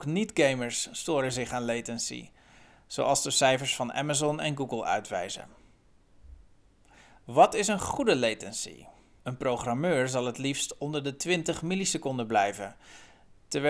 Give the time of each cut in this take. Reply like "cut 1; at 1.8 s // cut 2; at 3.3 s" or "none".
cut 1; at 9.2 s